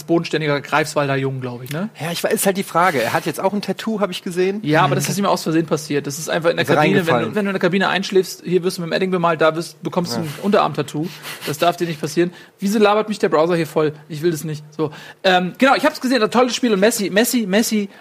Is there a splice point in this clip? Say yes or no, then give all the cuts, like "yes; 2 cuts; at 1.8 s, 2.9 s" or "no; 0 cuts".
yes; 1 cut; at 7.3 s